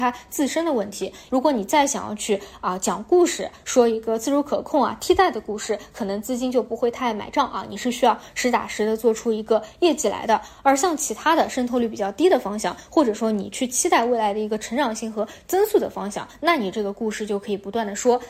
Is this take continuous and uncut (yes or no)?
no